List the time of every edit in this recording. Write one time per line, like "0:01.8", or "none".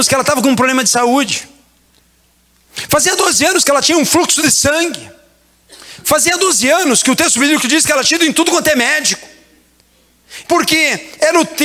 0:10.4